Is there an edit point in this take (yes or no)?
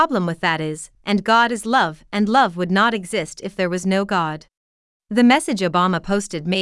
yes